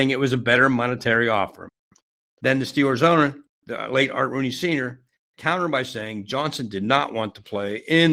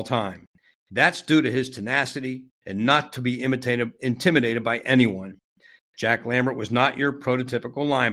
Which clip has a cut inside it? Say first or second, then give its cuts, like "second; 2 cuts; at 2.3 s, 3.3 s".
second; 1 cut; at 2.6 s